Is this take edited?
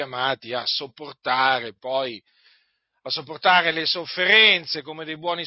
no; 0 cuts

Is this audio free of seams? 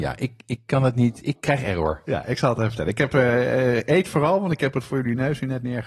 yes; 0 cuts

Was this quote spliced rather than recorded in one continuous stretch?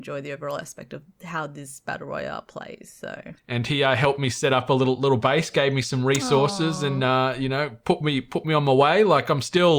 yes; 1 cut; at 3.4 s

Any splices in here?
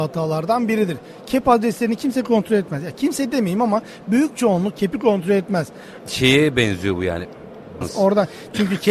yes; 2 cuts; at 6.0 s, 7.8 s

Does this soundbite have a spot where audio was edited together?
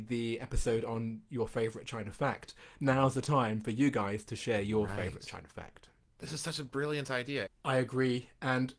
yes; 1 cut; at 7.5 s

